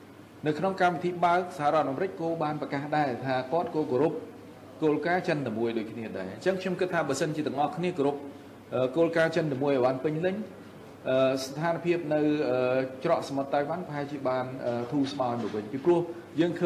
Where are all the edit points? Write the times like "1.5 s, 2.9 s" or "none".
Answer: none